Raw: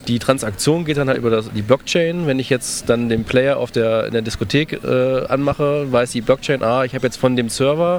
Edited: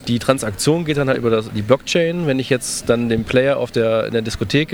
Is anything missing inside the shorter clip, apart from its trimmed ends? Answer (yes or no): no